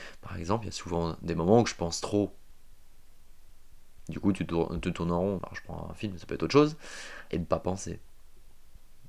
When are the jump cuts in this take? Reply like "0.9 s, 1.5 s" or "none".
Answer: 5.4 s, 7.3 s